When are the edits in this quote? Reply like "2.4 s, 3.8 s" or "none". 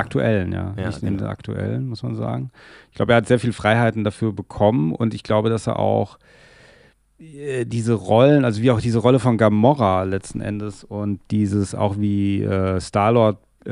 none